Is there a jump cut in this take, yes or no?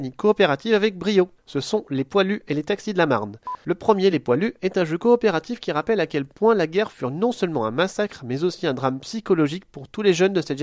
no